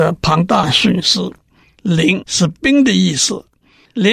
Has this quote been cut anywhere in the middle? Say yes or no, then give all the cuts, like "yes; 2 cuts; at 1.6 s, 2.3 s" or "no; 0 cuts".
yes; 1 cut; at 1.8 s